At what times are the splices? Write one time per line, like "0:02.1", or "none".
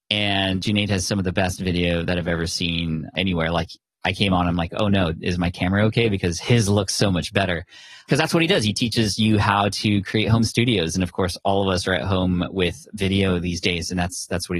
none